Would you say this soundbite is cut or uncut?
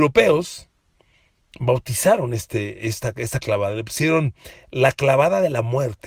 uncut